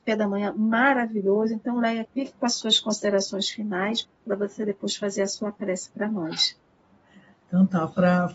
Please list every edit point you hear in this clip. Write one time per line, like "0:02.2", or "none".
0:02.1
0:04.0